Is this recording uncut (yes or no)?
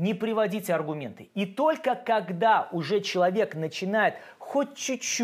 yes